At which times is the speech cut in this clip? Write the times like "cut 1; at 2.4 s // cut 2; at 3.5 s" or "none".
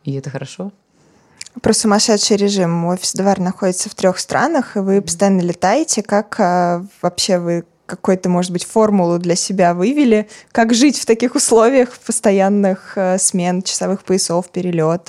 none